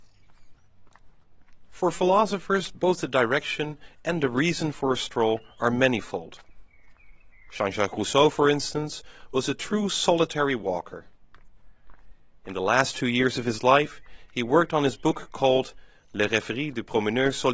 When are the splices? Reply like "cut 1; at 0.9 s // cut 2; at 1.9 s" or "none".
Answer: none

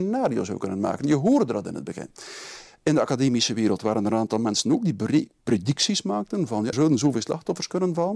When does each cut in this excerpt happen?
cut 1; at 5.4 s // cut 2; at 6.7 s

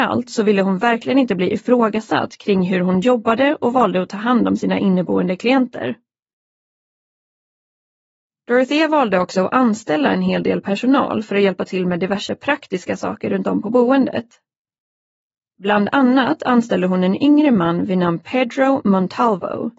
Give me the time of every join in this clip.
none

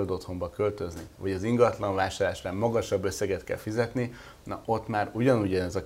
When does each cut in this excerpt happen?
cut 1; at 1.1 s

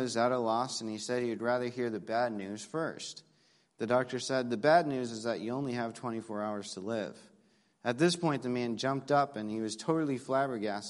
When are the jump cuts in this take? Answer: none

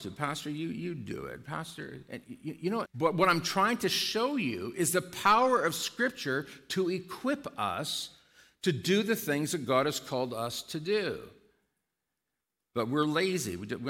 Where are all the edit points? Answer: cut 1; at 2.9 s

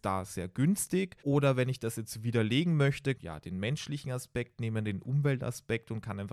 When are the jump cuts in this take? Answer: cut 1; at 1.2 s // cut 2; at 3.1 s

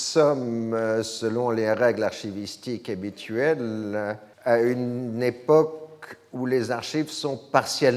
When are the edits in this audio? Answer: cut 1; at 4.3 s

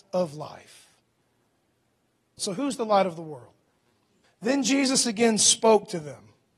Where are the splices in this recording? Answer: cut 1; at 2.4 s // cut 2; at 4.2 s

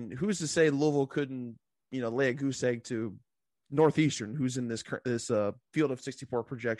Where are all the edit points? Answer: none

